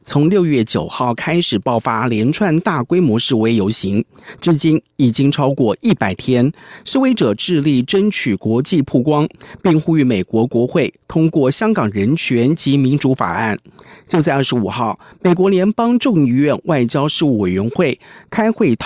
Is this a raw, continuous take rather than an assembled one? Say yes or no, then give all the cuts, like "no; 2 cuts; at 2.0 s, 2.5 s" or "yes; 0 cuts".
yes; 0 cuts